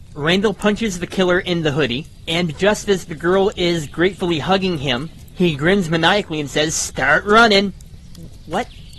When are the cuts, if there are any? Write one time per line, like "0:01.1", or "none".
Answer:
none